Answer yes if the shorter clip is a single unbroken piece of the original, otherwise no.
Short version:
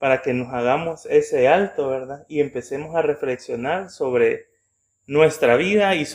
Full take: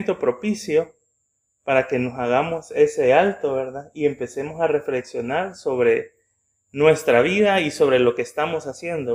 yes